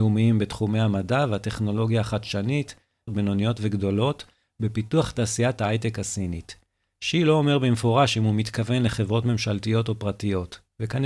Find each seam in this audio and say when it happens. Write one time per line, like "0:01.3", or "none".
0:03.1